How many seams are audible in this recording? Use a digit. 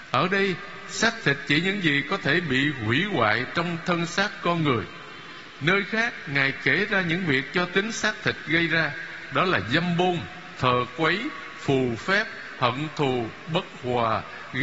1